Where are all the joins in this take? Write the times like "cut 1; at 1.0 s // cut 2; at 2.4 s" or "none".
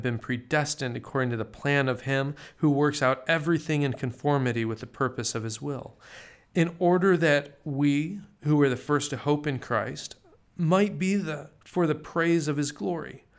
none